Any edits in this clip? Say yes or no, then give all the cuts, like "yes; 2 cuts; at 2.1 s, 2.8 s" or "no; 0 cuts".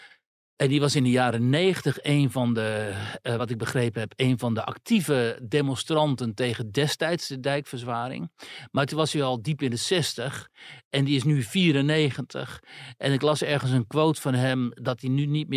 no; 0 cuts